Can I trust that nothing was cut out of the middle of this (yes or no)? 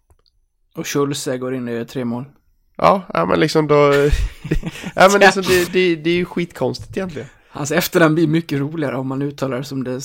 no